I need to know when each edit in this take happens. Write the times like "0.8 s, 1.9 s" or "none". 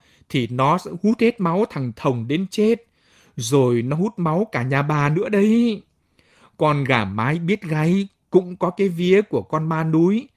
none